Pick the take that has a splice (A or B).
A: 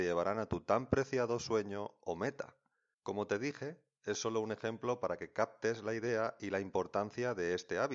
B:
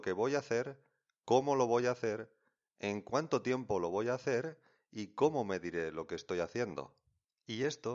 A